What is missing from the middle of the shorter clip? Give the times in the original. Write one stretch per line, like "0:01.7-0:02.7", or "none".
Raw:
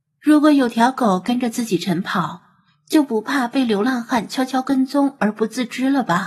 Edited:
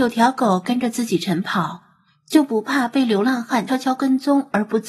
0:04.3-0:04.4

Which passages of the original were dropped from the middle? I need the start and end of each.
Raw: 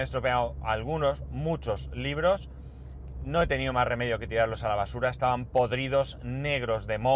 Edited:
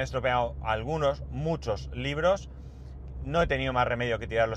none

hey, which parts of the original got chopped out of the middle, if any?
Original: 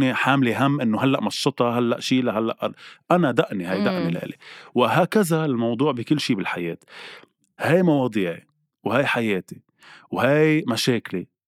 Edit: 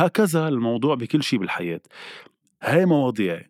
none

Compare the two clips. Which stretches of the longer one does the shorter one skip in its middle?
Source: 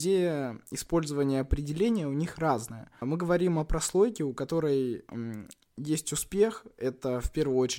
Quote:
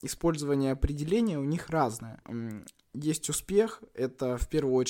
0:02.9-0:05.1

